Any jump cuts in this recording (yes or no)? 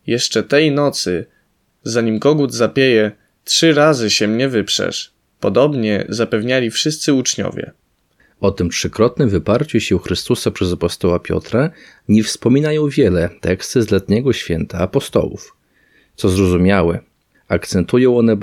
yes